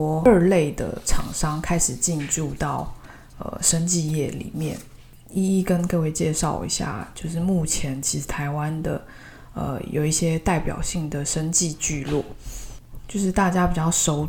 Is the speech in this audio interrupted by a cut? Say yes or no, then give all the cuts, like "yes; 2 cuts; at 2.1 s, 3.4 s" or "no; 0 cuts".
no; 0 cuts